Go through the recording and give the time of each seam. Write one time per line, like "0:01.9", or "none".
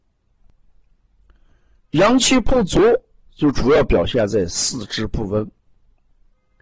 0:01.8